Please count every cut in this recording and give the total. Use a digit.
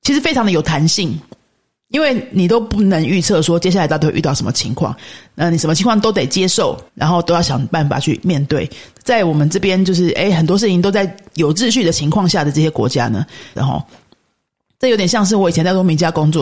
2